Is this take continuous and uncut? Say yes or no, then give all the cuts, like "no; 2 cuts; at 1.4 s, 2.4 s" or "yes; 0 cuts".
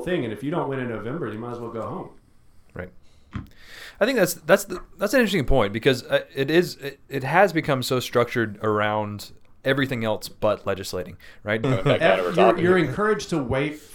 no; 1 cut; at 11.6 s